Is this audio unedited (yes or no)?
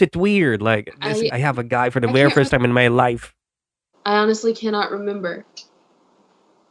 no